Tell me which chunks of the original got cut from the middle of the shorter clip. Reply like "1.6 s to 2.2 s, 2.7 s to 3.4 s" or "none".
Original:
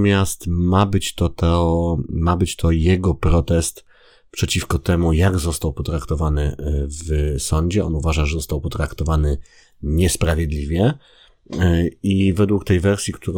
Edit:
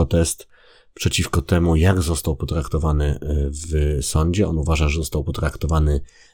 none